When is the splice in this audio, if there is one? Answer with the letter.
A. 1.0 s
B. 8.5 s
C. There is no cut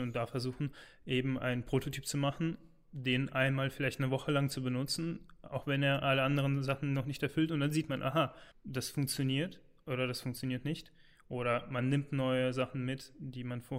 B